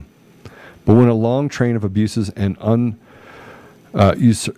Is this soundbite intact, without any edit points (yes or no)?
yes